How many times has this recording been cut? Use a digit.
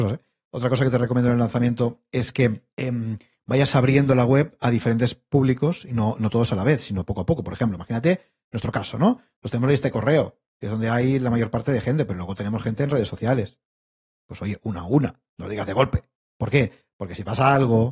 1